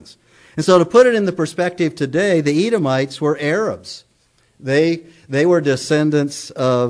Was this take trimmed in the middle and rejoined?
no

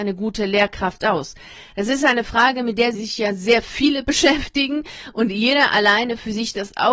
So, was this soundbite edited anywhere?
yes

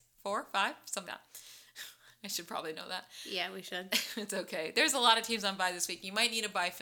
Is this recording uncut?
no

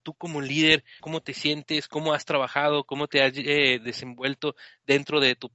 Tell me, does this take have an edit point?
yes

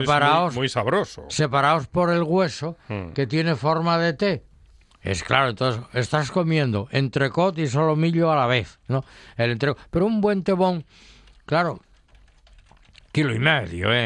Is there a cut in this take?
no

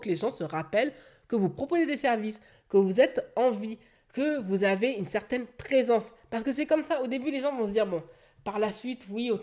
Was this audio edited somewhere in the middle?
no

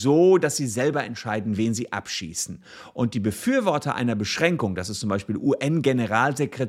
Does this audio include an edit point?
no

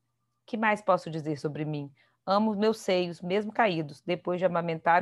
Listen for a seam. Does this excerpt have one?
no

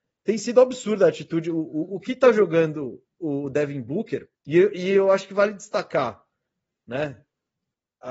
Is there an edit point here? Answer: yes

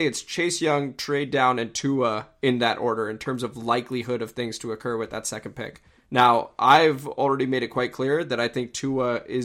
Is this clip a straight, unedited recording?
yes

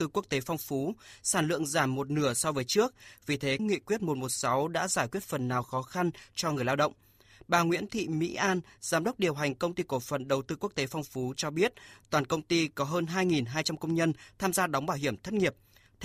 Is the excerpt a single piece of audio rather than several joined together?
no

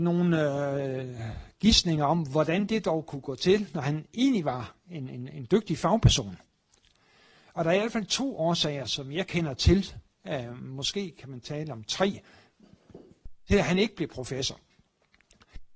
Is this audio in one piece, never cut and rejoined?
no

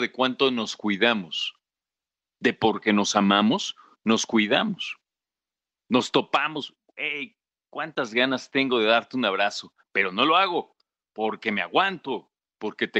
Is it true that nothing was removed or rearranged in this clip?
yes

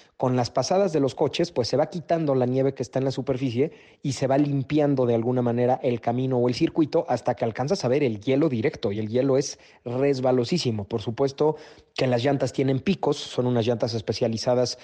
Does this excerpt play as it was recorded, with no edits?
yes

